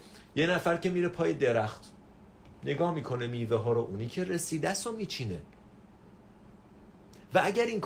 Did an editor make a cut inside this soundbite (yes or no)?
no